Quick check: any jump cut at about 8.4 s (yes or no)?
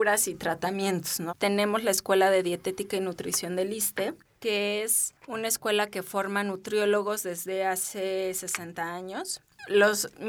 no